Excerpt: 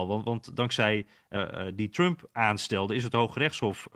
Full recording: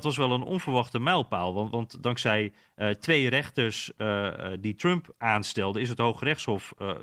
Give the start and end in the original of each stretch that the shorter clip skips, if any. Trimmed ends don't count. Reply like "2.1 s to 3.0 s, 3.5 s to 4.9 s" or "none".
2.8 s to 4.2 s